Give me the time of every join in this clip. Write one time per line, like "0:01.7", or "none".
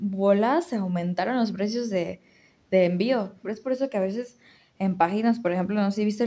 0:03.4